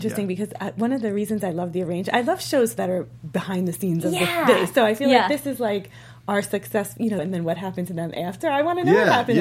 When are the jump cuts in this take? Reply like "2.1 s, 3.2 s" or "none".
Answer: 7.2 s